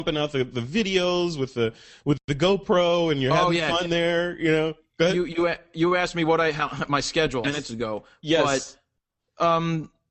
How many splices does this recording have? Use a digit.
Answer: 1